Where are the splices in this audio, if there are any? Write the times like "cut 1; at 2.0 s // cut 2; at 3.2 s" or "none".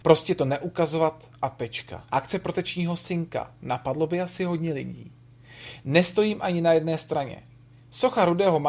cut 1; at 2.1 s // cut 2; at 5.8 s